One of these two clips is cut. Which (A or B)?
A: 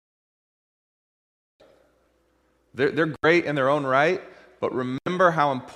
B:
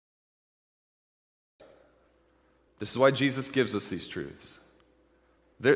A